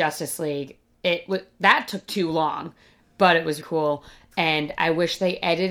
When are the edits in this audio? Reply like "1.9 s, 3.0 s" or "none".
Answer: 3.6 s